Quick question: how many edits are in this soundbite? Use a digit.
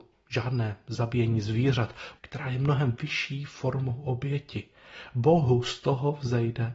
1